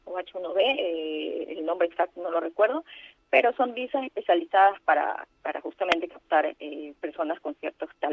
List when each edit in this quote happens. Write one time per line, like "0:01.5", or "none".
none